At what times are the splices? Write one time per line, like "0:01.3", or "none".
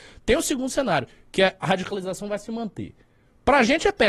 none